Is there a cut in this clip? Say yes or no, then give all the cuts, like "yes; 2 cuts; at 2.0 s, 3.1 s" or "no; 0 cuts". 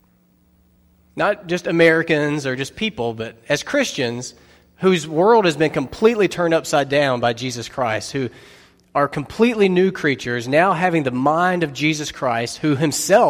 no; 0 cuts